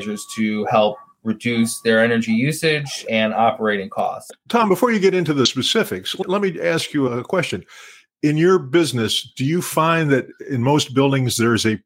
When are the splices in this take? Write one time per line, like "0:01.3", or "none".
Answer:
none